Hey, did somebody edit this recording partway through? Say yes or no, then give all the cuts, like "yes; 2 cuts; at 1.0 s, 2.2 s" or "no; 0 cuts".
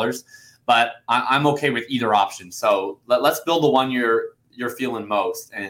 no; 0 cuts